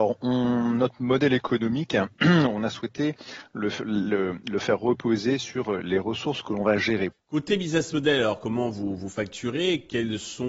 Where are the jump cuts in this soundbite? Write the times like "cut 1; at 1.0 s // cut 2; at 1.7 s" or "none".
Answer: cut 1; at 7.1 s